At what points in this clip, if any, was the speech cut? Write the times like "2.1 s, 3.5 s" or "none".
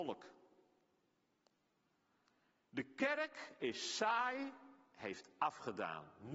none